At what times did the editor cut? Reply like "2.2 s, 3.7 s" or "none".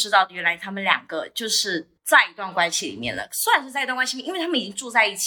2.0 s